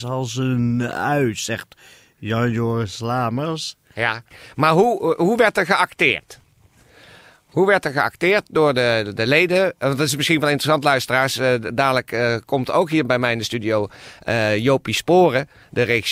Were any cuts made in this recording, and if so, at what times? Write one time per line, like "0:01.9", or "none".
none